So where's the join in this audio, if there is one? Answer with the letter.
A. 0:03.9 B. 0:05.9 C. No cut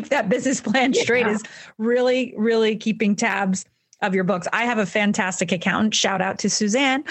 C